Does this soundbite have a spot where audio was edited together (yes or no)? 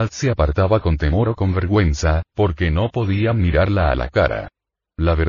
no